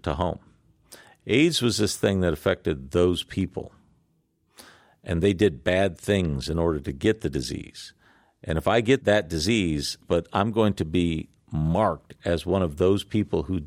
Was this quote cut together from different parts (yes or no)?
yes